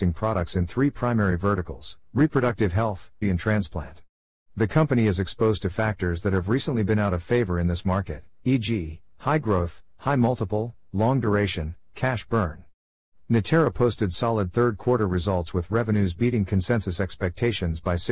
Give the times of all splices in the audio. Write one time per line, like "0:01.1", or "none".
0:03.2

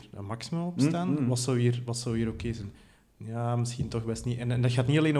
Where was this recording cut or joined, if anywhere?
none

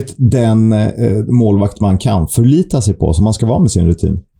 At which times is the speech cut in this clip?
none

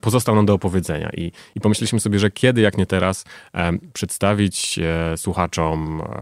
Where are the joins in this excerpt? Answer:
none

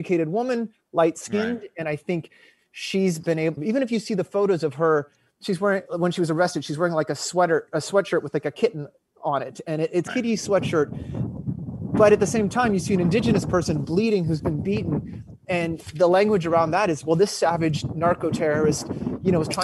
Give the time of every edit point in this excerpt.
0:03.6
0:10.1
0:14.4

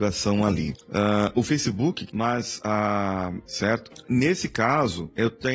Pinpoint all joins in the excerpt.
0:02.1
0:03.4

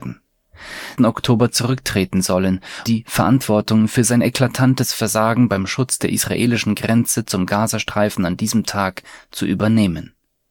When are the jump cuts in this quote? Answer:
0:01.0
0:02.9

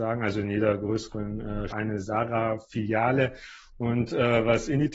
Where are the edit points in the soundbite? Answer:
0:01.7

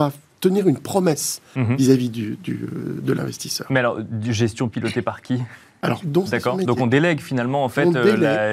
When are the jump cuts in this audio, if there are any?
0:04.7
0:06.0

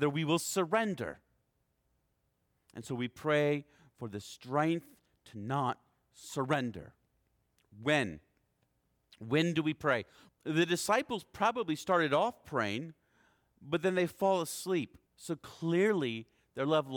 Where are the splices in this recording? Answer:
0:10.3
0:15.1

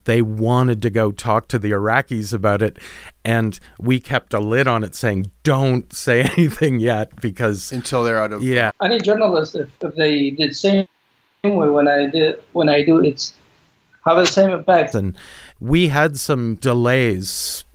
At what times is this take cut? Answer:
0:08.7
0:09.7
0:14.9

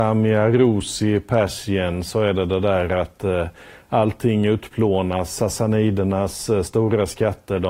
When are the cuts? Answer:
none

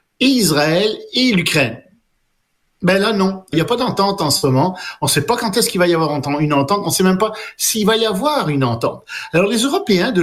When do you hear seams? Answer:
0:03.5

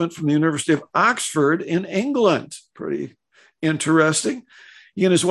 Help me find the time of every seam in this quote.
none

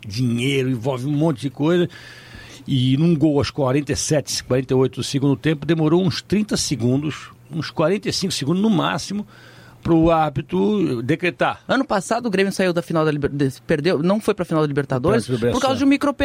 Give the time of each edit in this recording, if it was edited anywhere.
0:11.7

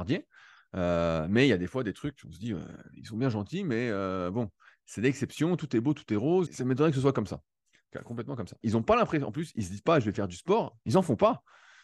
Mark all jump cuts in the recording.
0:06.5
0:08.6

